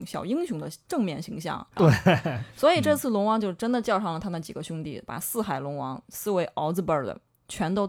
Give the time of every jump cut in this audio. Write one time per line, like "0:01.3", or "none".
0:01.8